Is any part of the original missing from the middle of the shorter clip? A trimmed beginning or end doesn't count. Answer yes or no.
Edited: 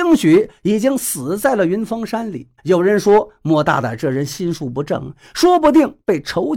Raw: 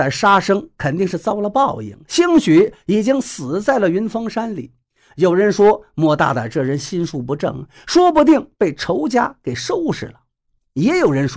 yes